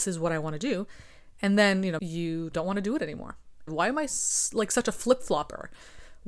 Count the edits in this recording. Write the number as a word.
two